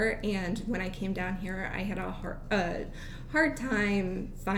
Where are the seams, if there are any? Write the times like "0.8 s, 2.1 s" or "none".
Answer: none